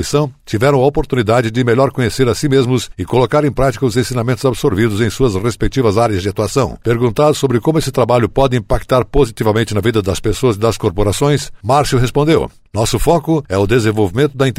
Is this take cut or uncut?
cut